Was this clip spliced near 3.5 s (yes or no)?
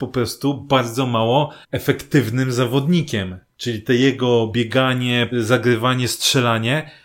no